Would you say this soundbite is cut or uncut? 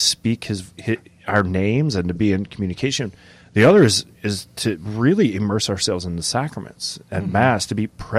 uncut